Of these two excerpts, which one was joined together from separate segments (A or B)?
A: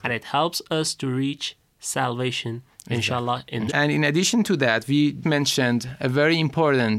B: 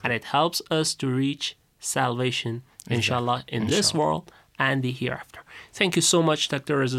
A